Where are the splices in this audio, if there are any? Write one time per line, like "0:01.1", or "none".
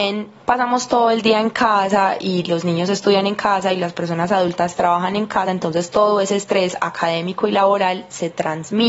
none